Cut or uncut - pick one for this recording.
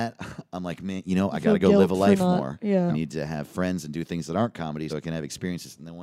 cut